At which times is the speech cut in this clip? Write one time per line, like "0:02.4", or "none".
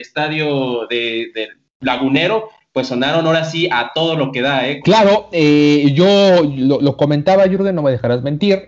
0:04.8